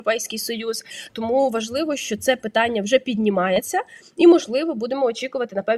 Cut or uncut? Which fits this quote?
cut